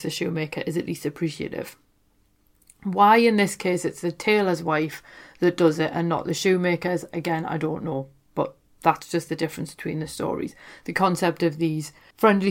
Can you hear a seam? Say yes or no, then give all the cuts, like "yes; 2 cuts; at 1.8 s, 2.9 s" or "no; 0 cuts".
no; 0 cuts